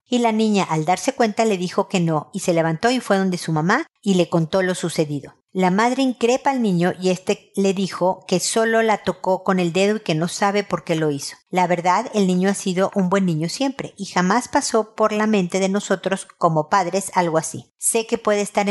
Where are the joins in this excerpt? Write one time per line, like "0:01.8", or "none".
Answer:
none